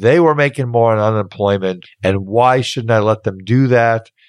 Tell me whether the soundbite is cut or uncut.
cut